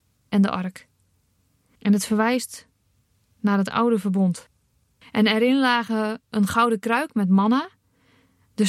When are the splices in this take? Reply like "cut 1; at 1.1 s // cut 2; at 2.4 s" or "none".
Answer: cut 1; at 1.8 s // cut 2; at 5.0 s